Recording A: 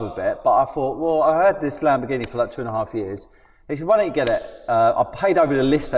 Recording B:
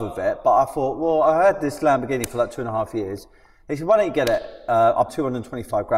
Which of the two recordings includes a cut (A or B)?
B